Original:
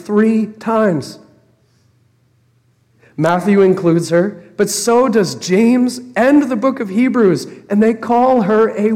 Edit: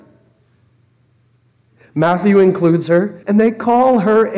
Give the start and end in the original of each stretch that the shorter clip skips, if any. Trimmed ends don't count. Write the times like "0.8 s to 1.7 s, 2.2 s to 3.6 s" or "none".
4.4 s to 7.7 s